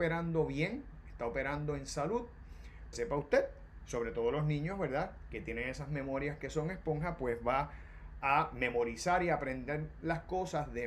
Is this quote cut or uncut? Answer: cut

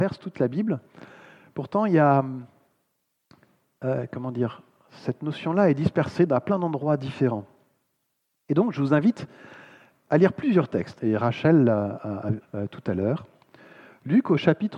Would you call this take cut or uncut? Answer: cut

